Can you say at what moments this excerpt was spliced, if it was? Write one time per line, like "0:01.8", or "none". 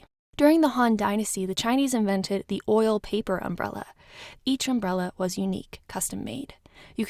0:04.3